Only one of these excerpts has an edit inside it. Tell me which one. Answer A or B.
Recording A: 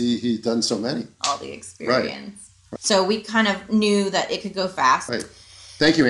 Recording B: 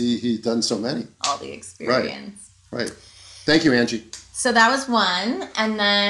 A